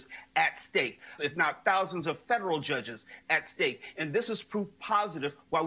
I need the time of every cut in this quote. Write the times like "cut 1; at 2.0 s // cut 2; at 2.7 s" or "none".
cut 1; at 1.2 s

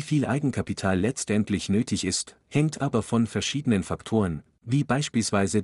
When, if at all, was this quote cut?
none

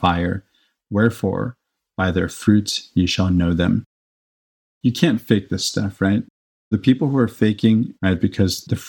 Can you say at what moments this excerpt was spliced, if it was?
cut 1; at 8.0 s

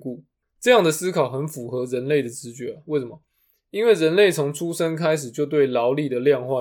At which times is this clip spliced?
none

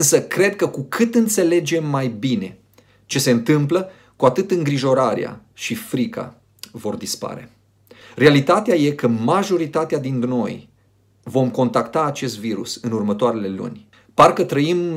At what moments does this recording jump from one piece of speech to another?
cut 1; at 8.0 s // cut 2; at 13.9 s

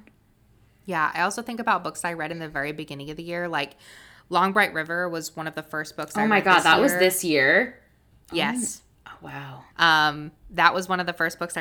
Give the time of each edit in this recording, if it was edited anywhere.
cut 1; at 8.1 s // cut 2; at 9.7 s

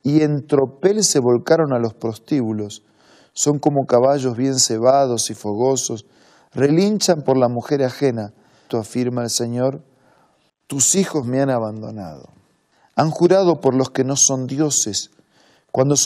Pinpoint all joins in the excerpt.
cut 1; at 8.7 s // cut 2; at 10.5 s

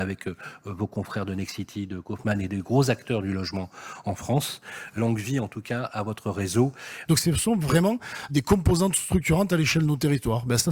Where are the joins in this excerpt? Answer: cut 1; at 5.0 s // cut 2; at 7.1 s // cut 3; at 8.3 s

